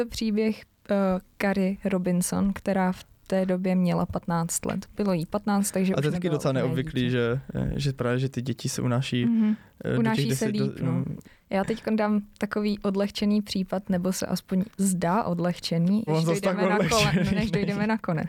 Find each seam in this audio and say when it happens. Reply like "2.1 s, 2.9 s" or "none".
11.2 s, 16.1 s